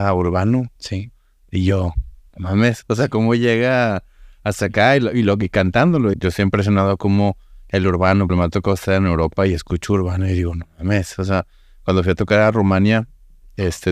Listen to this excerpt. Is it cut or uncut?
cut